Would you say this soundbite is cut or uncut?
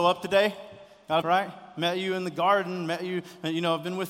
cut